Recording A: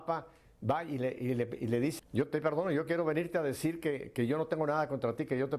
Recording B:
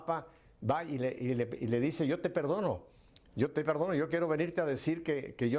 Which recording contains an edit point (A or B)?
A